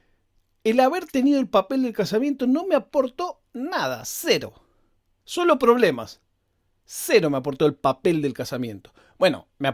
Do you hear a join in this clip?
no; 0 cuts

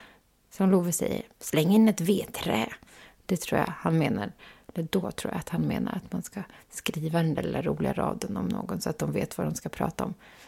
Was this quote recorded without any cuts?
yes; 0 cuts

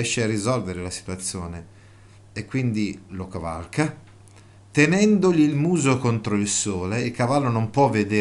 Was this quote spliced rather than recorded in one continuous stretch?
no; 0 cuts

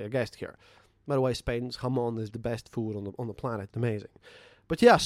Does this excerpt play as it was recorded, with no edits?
no; 2 cuts; at 2.3 s, 3.7 s

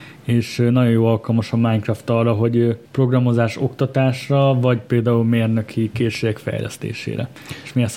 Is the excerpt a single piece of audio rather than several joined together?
no; 1 cut; at 2.9 s

